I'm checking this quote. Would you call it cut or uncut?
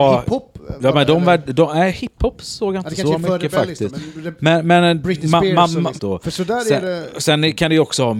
cut